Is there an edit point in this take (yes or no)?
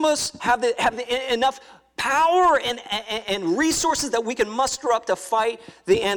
no